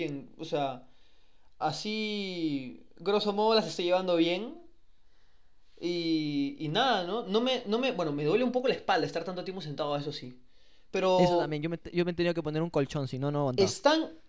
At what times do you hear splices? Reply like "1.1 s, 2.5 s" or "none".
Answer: 1.6 s

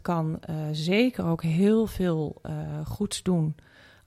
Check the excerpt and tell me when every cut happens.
none

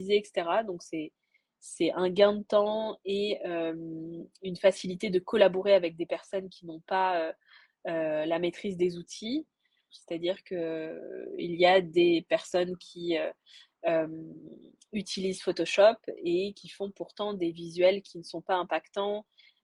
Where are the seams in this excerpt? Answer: 9.9 s

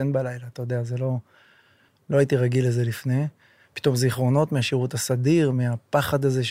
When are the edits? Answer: none

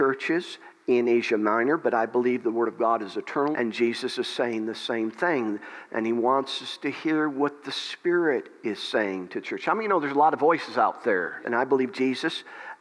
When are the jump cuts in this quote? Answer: 3.5 s, 11.4 s

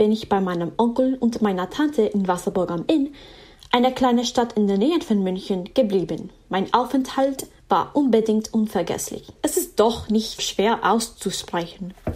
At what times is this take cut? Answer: 9.4 s, 10.4 s

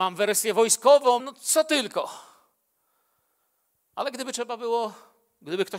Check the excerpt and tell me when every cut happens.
1.2 s

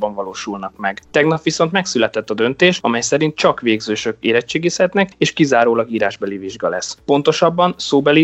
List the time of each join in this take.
none

